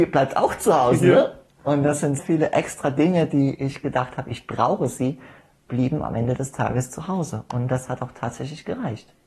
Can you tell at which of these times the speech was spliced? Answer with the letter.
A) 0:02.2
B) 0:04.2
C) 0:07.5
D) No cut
A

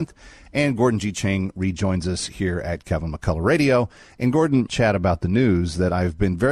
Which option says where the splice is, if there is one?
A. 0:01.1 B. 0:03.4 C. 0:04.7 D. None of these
C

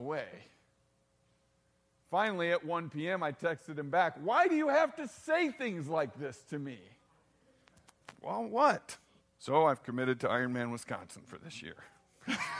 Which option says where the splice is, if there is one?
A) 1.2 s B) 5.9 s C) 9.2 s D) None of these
C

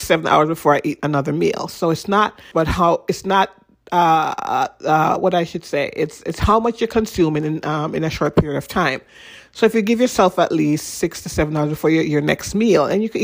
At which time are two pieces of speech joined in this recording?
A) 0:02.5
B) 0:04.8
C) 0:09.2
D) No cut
A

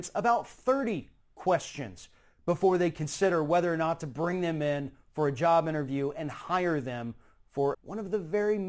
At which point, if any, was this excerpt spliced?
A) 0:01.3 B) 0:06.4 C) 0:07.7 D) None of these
C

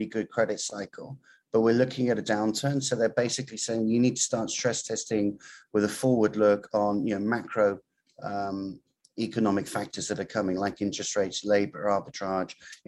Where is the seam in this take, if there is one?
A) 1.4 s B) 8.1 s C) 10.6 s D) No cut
D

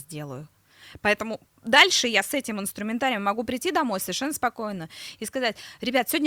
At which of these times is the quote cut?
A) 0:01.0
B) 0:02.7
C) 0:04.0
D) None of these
D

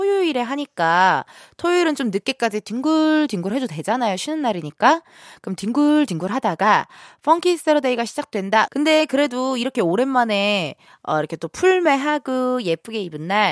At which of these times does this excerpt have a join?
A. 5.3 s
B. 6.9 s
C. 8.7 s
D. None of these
C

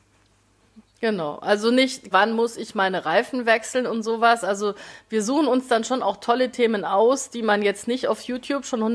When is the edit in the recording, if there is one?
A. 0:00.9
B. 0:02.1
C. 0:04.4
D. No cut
B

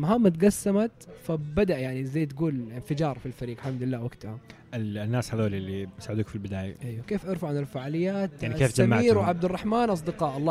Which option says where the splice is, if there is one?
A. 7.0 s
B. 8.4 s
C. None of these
A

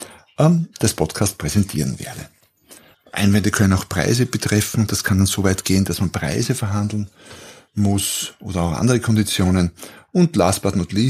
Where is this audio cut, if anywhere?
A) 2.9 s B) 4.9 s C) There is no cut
A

